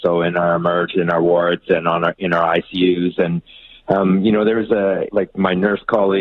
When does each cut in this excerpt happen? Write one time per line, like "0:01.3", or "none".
0:05.1